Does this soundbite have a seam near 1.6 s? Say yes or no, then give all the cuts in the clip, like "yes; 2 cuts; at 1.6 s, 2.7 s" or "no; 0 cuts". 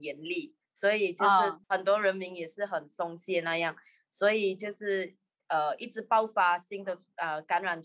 yes; 1 cut; at 1.6 s